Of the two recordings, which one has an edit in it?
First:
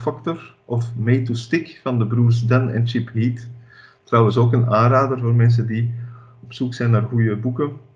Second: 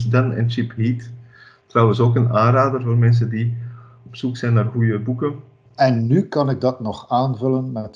second; 1 cut; at 5.7 s

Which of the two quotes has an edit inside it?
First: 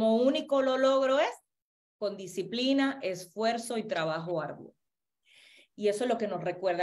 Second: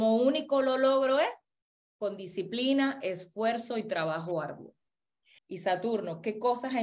second; 1 cut; at 5.4 s

